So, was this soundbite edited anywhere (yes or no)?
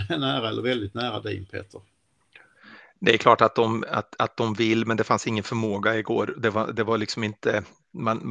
no